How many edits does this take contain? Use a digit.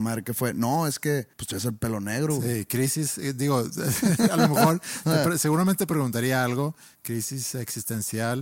1